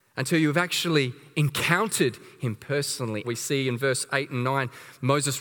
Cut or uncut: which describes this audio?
cut